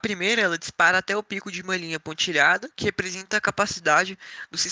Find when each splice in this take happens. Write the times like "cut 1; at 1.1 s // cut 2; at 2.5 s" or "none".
none